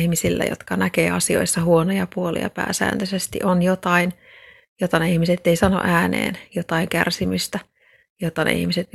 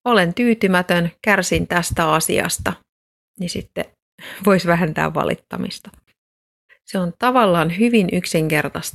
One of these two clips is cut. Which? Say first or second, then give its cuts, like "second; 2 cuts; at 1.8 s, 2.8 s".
second; 1 cut; at 6.7 s